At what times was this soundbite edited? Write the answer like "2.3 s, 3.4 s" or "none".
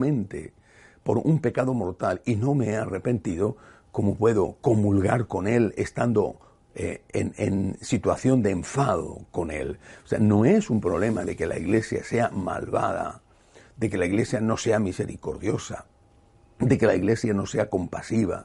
none